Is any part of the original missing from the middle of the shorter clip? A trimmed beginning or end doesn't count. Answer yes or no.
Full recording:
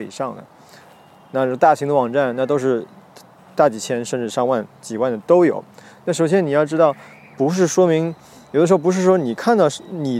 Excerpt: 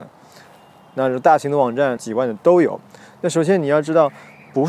yes